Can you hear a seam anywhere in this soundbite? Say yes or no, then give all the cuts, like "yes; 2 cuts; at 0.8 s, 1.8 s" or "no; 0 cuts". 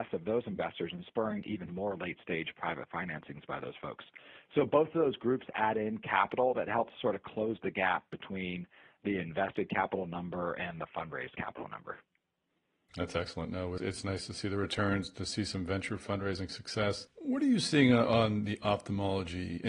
yes; 1 cut; at 13.8 s